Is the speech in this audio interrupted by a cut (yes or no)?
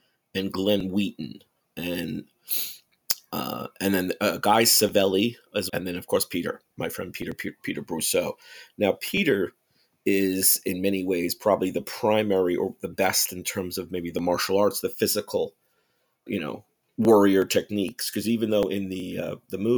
yes